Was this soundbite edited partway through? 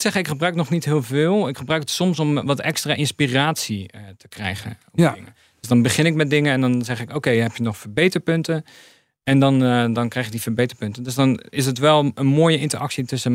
no; 0 cuts

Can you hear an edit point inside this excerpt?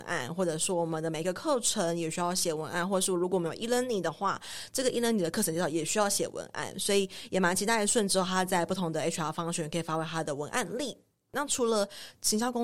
no; 0 cuts

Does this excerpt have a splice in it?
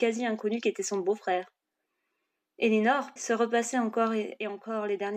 yes; 1 cut; at 3.2 s

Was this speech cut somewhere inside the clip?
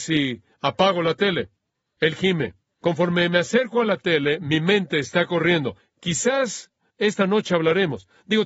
no; 0 cuts

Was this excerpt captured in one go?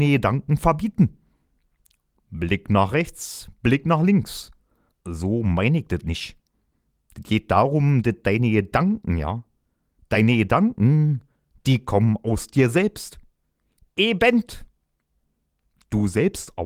no; 1 cut; at 4.9 s

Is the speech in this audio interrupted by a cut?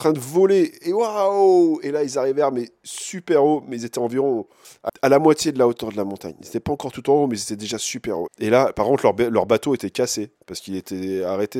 yes; 2 cuts; at 4.9 s, 8.3 s

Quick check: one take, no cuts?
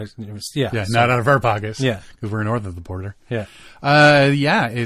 yes; 0 cuts

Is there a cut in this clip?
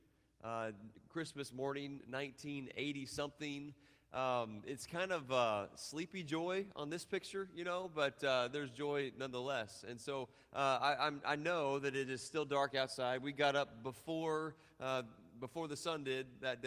no; 0 cuts

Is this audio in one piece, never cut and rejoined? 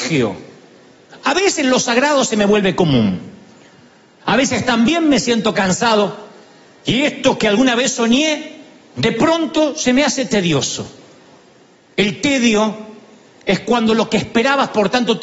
yes; 0 cuts

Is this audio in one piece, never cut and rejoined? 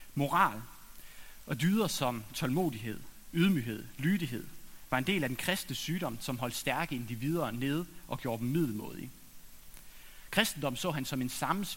yes; 0 cuts

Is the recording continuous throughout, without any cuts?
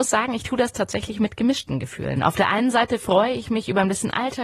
yes; 0 cuts

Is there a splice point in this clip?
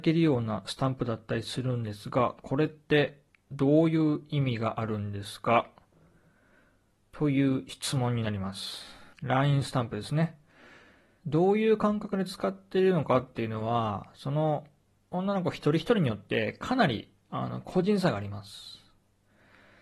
yes; 2 cuts; at 9.1 s, 11.2 s

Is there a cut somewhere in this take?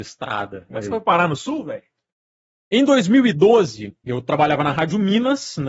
no; 0 cuts

